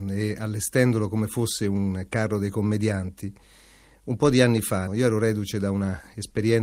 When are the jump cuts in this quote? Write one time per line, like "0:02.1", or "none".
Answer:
0:04.9